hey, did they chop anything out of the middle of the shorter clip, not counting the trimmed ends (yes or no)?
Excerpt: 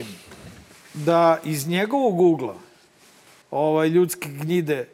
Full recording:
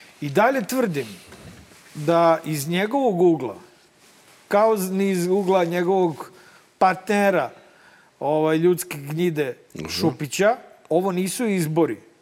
yes